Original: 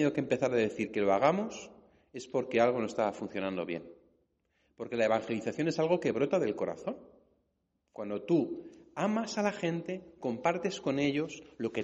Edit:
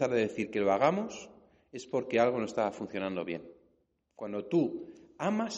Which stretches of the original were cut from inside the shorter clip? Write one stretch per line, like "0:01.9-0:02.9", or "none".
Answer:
0:04.4-0:07.8